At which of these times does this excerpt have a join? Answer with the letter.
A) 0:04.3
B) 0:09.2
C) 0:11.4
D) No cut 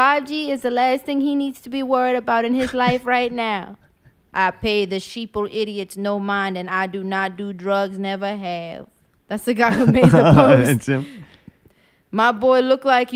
A